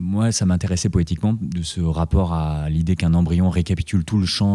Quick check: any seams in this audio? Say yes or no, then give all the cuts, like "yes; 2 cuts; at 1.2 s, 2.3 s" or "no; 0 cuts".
no; 0 cuts